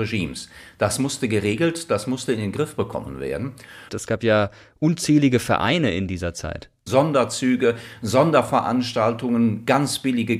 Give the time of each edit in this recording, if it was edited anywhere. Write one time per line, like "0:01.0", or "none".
0:03.9
0:06.9